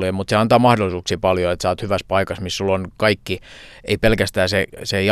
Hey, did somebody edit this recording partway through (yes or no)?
no